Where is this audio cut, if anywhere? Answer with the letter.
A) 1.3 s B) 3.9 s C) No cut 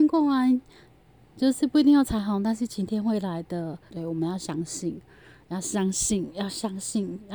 B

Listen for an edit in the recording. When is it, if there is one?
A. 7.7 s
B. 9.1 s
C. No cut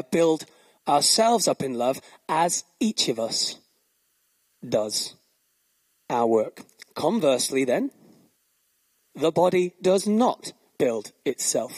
B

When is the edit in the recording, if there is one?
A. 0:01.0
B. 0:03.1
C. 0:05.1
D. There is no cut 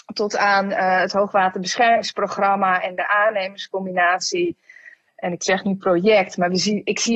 C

